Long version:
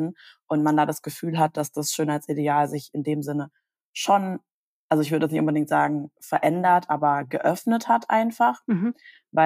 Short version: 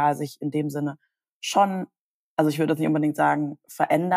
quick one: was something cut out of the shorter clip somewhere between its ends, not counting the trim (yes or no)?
no